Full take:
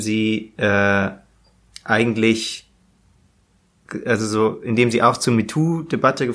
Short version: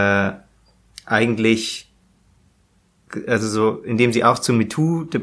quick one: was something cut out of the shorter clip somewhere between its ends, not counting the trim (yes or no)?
no